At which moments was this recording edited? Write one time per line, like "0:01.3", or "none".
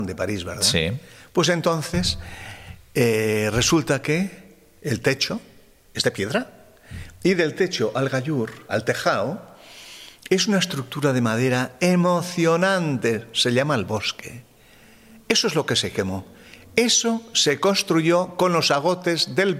0:08.7